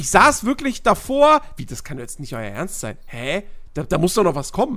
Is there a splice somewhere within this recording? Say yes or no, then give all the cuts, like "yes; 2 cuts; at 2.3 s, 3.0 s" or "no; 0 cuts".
yes; 1 cut; at 1.6 s